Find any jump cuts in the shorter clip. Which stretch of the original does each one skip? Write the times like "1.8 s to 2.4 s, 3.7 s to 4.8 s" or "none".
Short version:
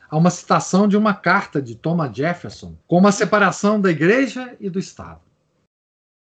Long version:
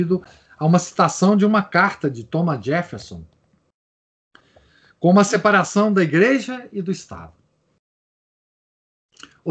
3.3 s to 4.9 s

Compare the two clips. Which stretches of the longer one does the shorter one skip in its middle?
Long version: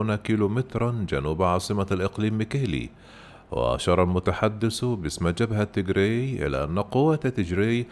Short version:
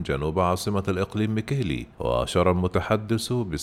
3.0 s to 3.4 s

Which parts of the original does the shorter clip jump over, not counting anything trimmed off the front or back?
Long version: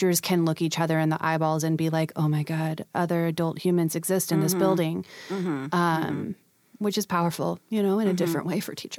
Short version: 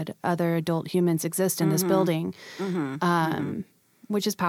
none

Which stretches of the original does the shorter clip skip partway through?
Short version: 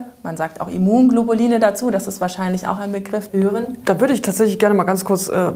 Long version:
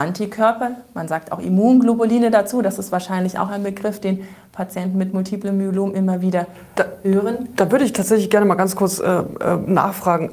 4.0 s to 7.0 s

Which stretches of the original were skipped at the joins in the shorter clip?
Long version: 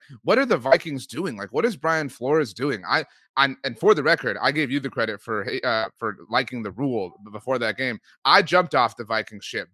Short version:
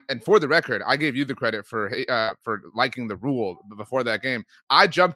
none

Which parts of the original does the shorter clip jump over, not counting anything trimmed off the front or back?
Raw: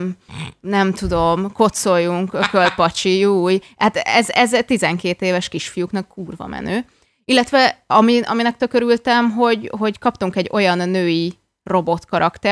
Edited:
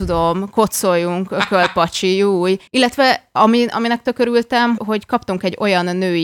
3.7 s to 7.2 s, 9.3 s to 9.7 s

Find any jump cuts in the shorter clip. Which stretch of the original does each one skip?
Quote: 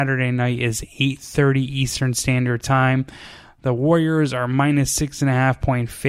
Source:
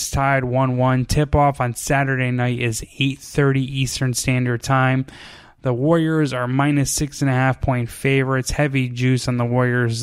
none

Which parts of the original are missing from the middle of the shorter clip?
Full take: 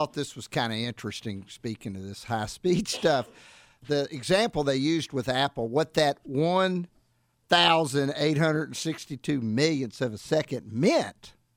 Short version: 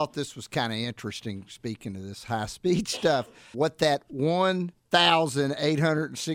3.5 s to 5.7 s, 6.9 s to 7.4 s

